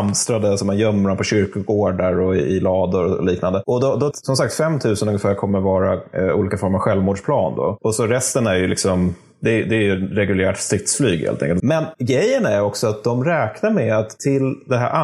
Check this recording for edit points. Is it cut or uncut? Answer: cut